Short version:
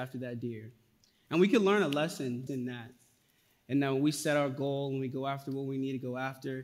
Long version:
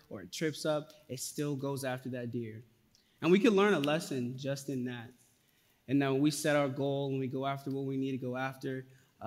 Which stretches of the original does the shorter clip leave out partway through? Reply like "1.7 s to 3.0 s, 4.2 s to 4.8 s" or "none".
4.4 s to 4.7 s